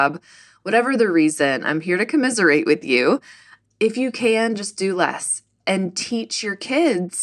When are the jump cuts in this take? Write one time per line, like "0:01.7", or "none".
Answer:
0:03.6